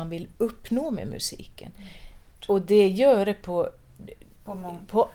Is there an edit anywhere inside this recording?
yes; 1 cut; at 2.4 s

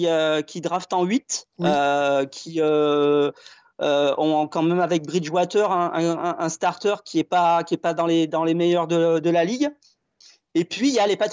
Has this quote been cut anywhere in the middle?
no; 0 cuts

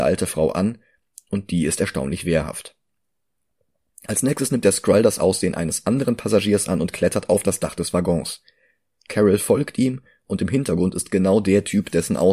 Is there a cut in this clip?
no; 0 cuts

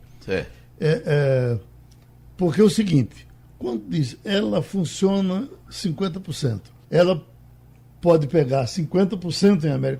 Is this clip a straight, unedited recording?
no; 1 cut; at 6.8 s

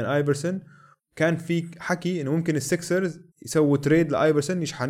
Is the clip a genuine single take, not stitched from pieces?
no; 1 cut; at 3.3 s

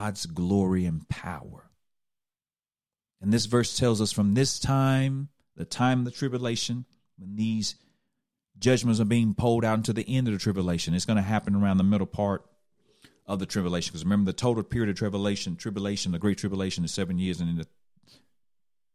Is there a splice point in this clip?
no; 0 cuts

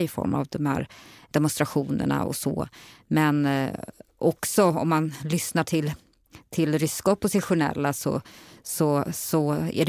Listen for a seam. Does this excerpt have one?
no; 0 cuts

